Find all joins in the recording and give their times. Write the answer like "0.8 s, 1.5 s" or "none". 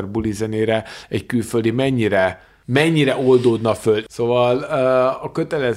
none

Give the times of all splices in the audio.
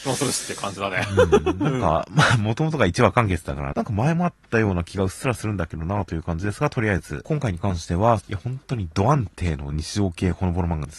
3.7 s, 8.2 s

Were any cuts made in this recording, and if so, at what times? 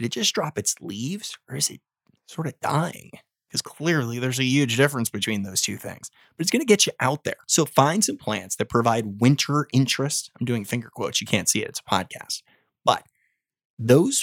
none

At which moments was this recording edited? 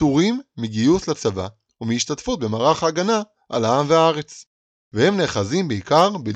none

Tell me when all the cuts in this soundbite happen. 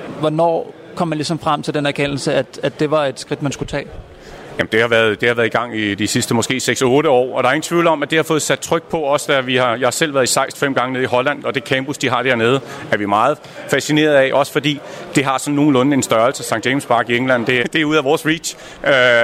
17.6 s

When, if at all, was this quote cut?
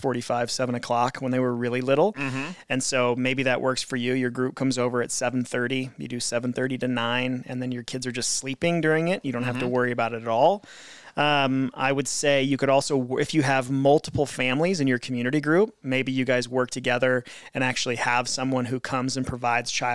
none

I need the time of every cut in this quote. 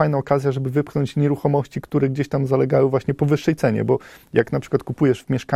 none

